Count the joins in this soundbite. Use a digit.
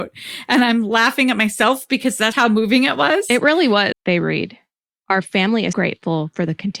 3